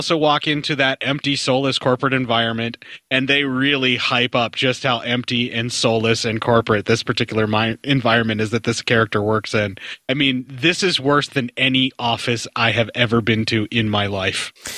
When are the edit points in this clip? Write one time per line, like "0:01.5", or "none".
none